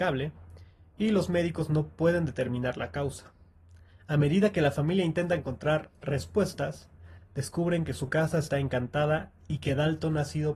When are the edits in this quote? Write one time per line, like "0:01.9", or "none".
none